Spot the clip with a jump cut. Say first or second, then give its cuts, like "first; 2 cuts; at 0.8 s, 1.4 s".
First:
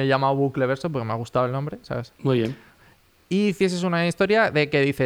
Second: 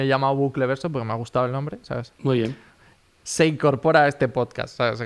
second; 1 cut; at 3.2 s